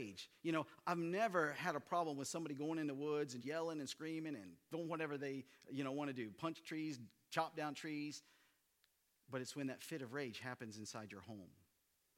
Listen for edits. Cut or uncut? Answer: cut